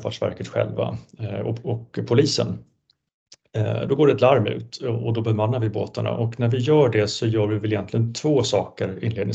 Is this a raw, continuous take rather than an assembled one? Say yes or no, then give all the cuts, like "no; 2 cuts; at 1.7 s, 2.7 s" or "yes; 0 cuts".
yes; 0 cuts